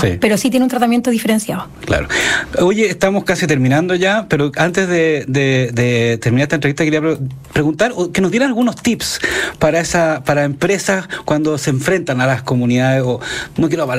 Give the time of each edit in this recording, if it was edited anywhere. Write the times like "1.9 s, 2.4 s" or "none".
none